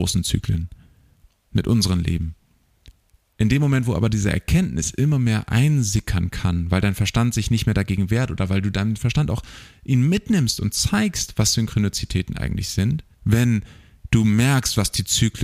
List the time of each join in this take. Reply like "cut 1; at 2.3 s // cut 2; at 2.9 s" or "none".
cut 1; at 13.1 s